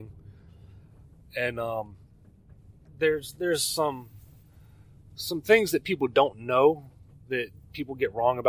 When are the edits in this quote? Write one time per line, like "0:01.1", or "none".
0:02.9